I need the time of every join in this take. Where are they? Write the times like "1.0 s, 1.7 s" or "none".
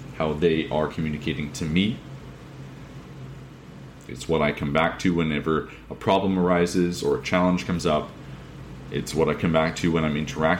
4.1 s